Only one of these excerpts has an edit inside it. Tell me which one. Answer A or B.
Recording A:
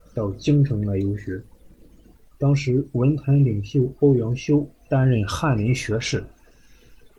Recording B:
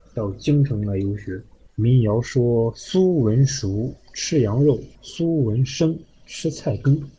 B